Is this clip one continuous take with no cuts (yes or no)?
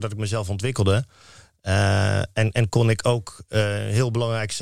yes